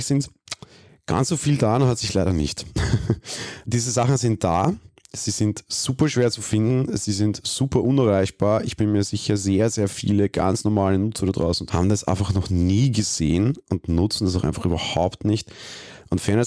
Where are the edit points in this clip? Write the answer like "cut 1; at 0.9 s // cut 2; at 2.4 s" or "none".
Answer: cut 1; at 3.6 s // cut 2; at 11.7 s